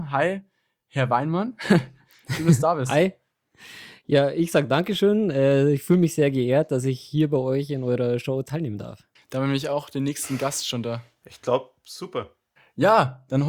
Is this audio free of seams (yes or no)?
no